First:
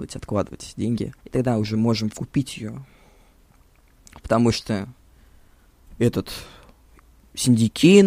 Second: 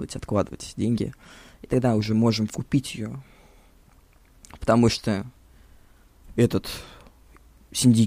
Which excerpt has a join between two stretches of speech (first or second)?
first